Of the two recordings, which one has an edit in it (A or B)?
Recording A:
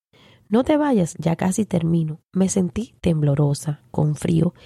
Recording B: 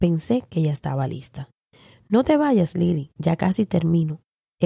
A